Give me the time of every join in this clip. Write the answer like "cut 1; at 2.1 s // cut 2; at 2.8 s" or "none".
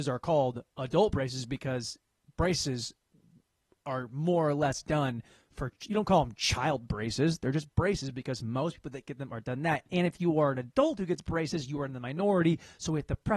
none